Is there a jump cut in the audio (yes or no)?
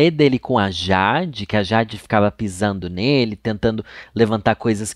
no